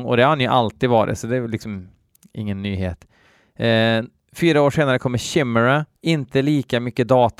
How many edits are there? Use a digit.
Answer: 1